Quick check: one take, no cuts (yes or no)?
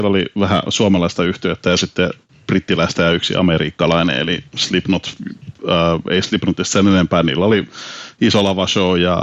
yes